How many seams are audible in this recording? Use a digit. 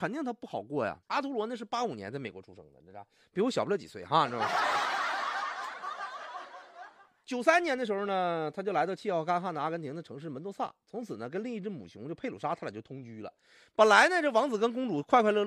1